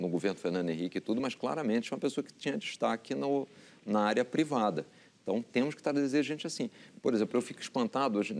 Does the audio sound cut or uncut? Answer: uncut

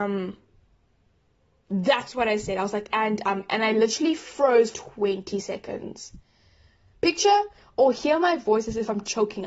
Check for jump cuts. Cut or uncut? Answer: cut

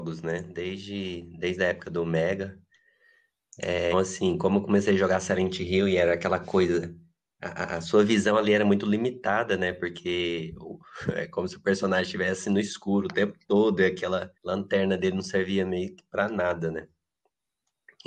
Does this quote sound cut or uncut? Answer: cut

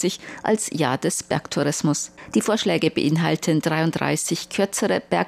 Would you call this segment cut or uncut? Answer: uncut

